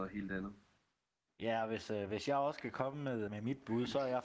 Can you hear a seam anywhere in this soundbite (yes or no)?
yes